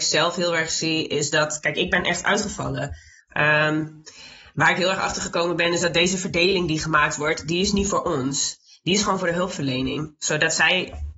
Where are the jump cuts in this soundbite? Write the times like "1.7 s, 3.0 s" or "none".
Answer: 3.2 s